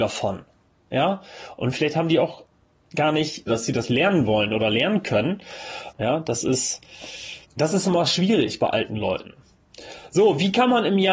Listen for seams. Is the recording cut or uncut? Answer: cut